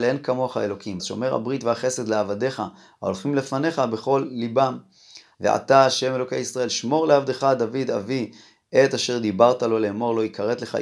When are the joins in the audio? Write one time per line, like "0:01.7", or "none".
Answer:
0:01.0
0:05.3